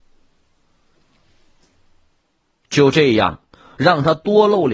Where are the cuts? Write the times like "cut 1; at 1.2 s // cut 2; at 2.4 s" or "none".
cut 1; at 3.8 s